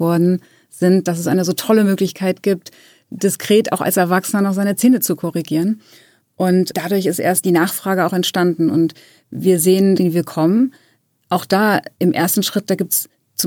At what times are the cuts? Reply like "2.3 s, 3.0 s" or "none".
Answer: 10.0 s